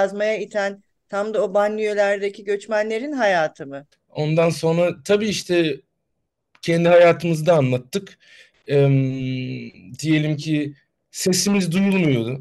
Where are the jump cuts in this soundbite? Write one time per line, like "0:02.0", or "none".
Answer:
0:03.9